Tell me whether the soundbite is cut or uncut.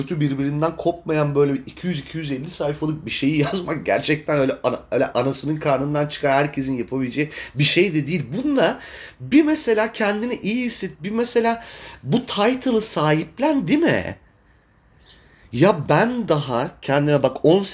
uncut